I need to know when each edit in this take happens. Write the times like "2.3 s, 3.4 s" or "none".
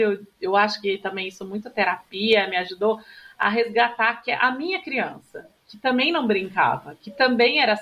none